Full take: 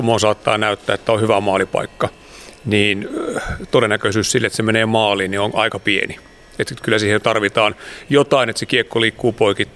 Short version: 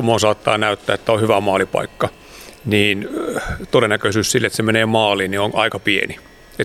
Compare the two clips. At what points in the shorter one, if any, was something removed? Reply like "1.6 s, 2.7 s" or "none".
none